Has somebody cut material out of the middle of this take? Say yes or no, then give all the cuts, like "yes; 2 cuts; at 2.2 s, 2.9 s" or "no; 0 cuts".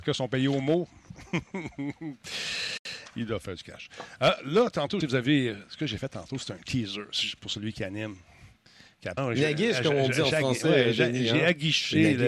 yes; 2 cuts; at 5.0 s, 9.2 s